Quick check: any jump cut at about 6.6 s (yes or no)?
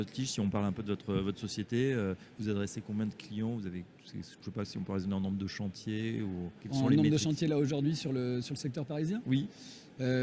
yes